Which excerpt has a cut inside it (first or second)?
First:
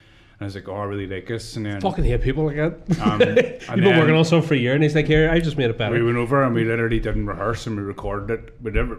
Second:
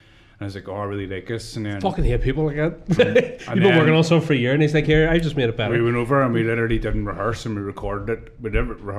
second